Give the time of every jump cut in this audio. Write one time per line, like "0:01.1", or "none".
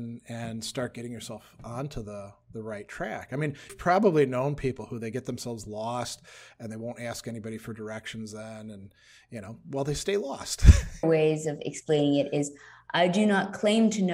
0:03.7
0:11.0